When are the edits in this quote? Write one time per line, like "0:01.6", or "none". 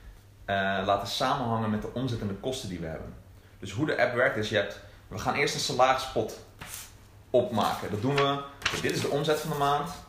none